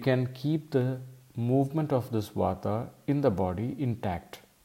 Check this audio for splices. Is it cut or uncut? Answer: uncut